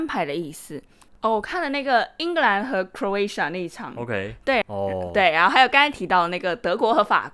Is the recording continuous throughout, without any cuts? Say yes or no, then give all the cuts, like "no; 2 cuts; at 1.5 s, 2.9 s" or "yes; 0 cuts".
no; 2 cuts; at 1.1 s, 4.6 s